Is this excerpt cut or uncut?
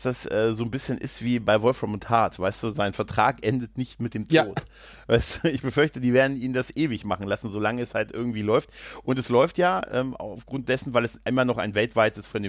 uncut